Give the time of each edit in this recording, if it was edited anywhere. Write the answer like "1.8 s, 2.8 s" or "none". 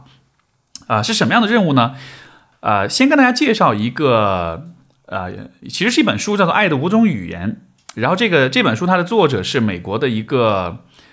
none